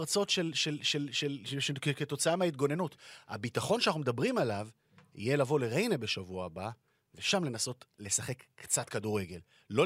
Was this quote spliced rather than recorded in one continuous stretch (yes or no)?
no